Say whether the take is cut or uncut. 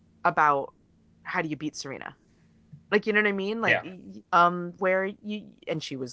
cut